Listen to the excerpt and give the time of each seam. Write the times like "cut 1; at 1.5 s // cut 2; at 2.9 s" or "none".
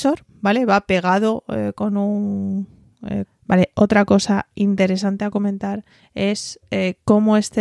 cut 1; at 3.2 s